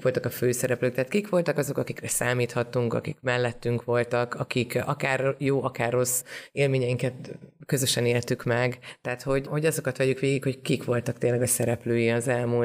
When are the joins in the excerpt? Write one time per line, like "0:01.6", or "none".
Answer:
none